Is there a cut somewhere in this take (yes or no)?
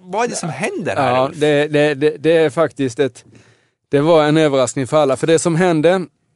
no